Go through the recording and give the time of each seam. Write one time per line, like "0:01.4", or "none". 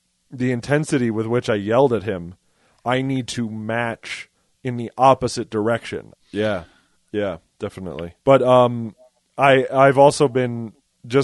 0:06.1
0:08.2